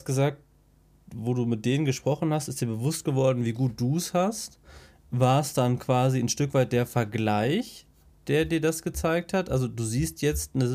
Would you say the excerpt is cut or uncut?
uncut